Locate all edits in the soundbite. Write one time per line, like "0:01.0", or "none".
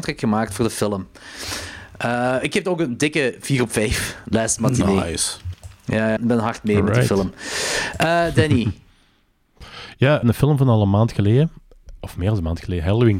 0:06.2
0:10.2